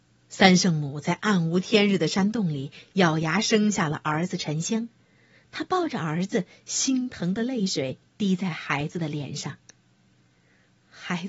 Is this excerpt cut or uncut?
uncut